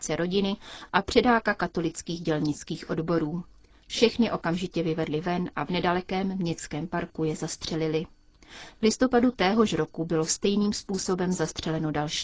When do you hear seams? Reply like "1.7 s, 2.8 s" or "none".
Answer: none